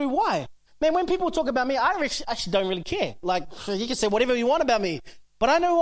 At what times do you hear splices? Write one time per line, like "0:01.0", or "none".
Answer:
none